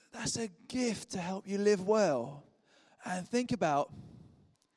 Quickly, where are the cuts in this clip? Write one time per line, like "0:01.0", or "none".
0:02.9